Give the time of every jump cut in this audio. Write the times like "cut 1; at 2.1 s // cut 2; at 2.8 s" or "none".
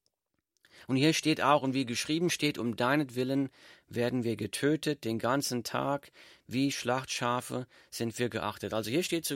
none